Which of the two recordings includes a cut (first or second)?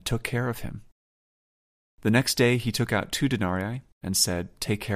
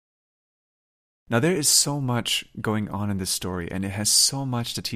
first